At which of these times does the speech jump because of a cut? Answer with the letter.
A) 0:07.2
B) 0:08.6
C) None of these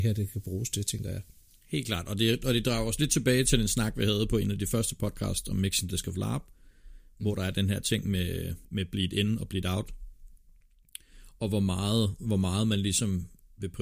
B